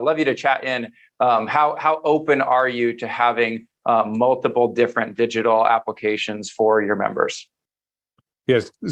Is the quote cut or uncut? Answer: uncut